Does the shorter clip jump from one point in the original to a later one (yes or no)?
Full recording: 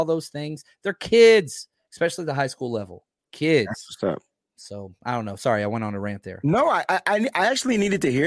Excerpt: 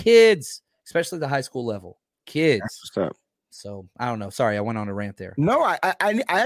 no